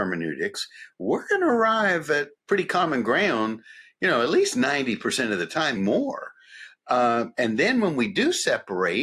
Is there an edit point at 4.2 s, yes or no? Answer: no